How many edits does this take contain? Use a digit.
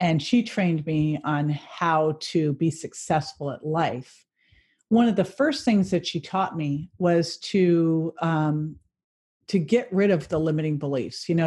0